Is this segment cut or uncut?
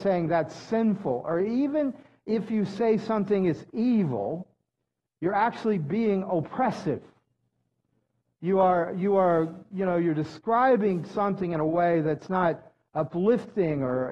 uncut